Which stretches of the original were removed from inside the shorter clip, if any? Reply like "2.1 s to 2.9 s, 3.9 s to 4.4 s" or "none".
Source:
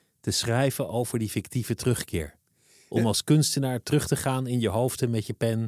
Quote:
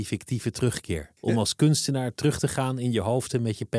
2.4 s to 2.9 s